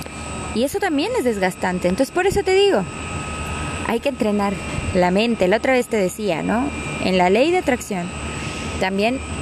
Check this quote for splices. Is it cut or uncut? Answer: uncut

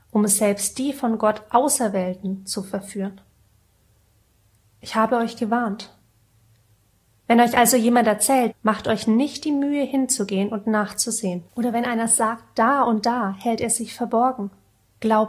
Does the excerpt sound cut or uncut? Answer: cut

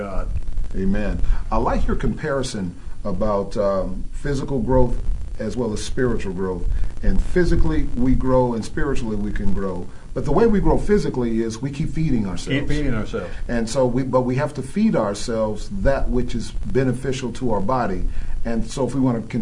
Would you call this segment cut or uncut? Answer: uncut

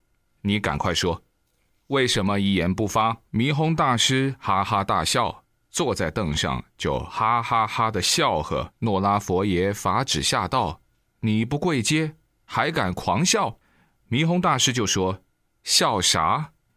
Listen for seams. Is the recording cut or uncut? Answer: cut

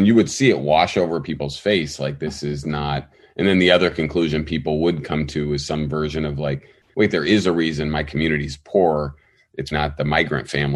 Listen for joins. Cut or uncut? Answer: cut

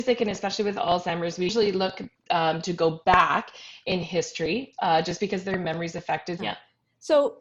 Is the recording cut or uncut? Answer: cut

